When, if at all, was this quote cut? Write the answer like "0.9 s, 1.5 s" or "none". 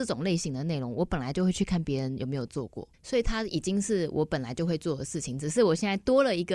2.9 s